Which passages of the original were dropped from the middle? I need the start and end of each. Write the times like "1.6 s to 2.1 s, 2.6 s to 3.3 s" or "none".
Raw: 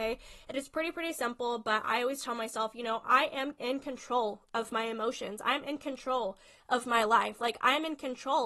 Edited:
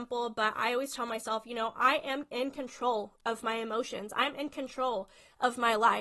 none